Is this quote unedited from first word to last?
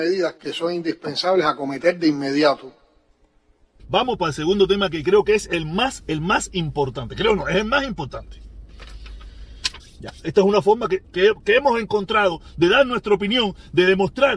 no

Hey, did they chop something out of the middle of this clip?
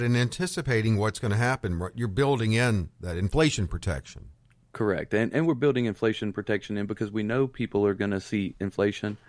no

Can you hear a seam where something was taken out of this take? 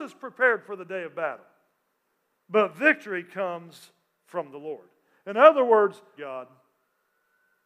yes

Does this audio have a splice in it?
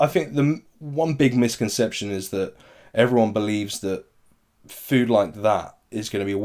no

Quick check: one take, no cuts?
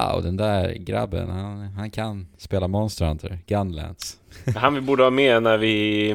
yes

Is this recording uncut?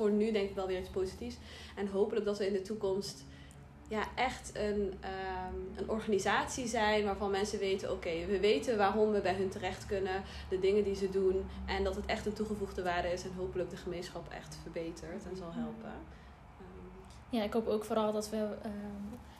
yes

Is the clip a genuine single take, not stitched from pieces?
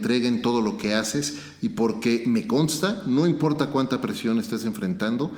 yes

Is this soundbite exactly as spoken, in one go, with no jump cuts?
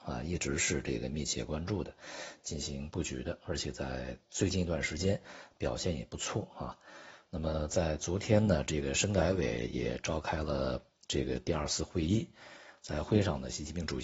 yes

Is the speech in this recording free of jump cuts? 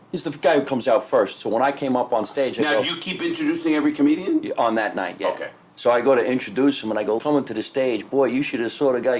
no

